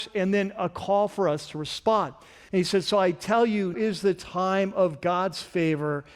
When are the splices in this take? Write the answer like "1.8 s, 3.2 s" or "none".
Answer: 2.5 s, 3.7 s